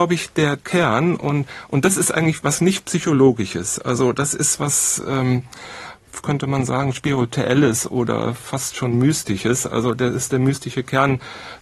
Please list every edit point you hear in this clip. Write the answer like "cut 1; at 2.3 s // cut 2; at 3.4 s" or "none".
none